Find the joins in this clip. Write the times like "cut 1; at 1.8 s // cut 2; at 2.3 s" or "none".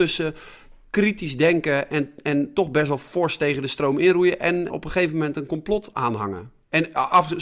cut 1; at 4.7 s